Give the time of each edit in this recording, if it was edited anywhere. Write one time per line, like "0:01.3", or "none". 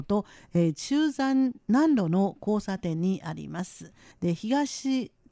0:04.1